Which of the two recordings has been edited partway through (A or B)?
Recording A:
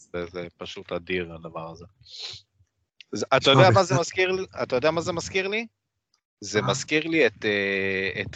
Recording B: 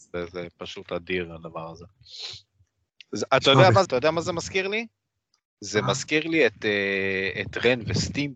B